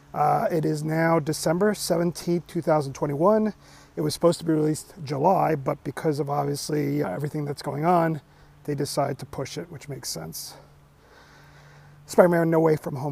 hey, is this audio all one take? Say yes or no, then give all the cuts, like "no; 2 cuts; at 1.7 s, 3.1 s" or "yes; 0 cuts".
no; 1 cut; at 7.0 s